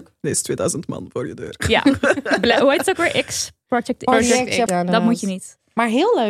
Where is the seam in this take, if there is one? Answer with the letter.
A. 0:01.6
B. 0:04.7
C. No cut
B